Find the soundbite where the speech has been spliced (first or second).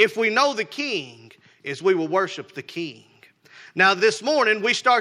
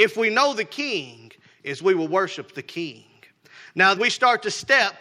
second